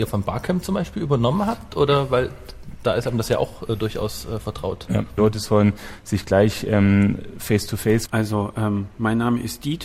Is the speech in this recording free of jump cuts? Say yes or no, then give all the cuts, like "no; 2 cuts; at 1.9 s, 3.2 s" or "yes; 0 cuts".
no; 2 cuts; at 5.2 s, 8.1 s